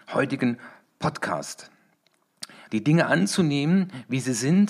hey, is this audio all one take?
no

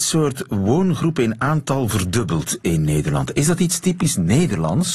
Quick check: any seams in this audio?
no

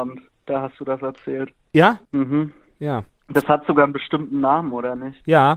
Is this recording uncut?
no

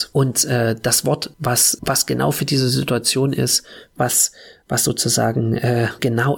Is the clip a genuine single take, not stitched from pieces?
yes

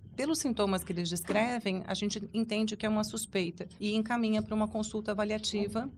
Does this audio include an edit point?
yes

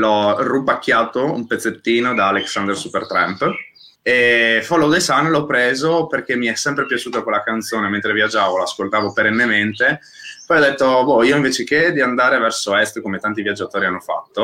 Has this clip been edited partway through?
no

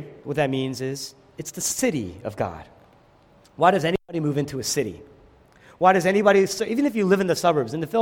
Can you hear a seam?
no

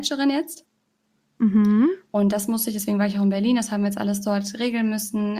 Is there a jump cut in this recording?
no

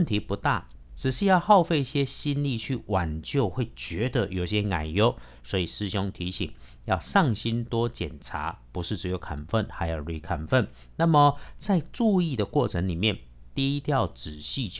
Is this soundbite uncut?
yes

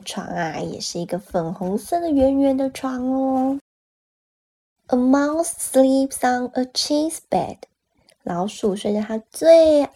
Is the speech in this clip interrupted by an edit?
no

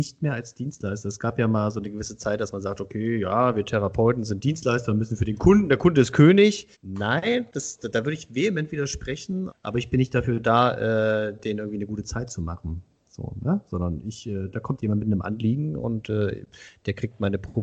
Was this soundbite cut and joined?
yes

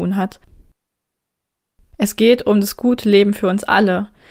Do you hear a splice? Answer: no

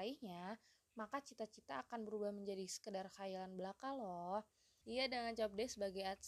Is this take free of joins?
no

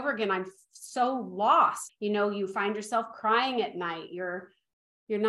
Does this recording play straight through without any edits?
no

